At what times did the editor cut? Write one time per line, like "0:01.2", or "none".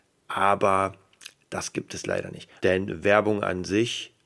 0:02.6